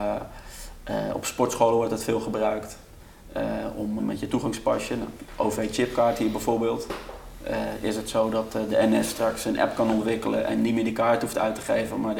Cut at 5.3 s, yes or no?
no